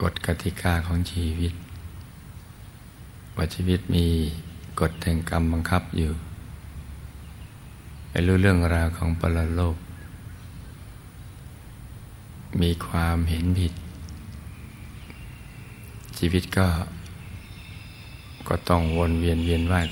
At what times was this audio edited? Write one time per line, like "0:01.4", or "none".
none